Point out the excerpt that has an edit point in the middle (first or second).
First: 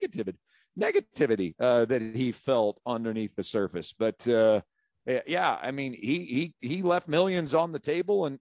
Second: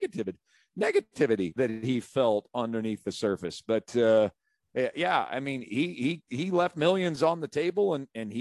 second